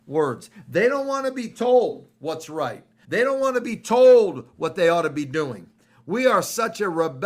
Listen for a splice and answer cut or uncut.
cut